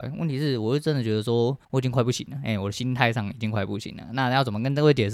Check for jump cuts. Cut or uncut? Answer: cut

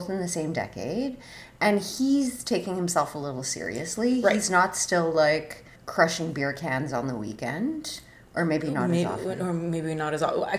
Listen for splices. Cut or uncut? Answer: cut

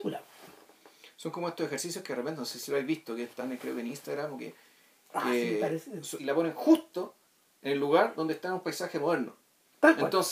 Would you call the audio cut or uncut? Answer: cut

